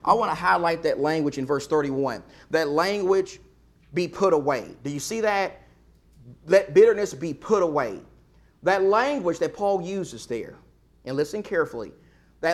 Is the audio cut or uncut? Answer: uncut